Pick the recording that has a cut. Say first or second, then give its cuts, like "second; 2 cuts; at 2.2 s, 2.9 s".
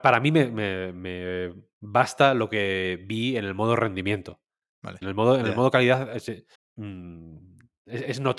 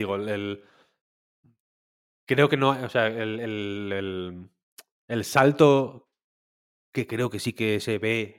first; 2 cuts; at 5.0 s, 6.5 s